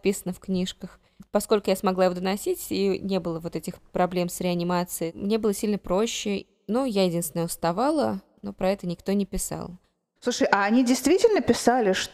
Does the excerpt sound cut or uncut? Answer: uncut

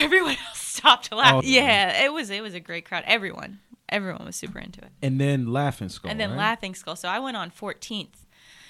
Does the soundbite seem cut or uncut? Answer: cut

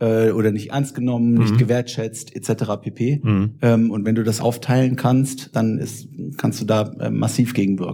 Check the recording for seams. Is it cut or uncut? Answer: cut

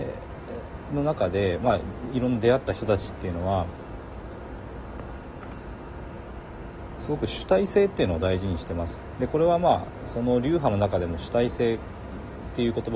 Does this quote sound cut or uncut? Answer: uncut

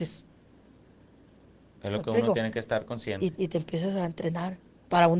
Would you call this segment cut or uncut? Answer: cut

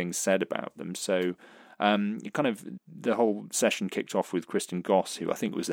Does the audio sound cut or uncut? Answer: cut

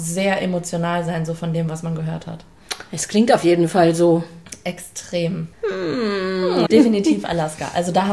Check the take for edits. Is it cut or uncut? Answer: cut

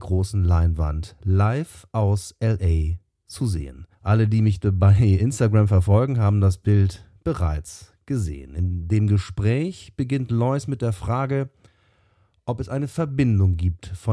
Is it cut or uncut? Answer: cut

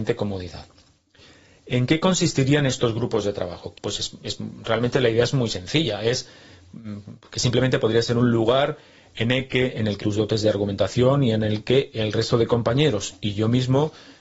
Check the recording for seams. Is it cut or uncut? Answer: cut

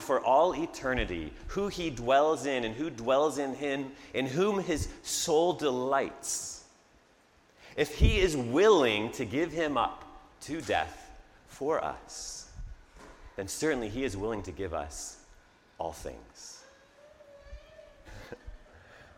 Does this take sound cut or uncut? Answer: cut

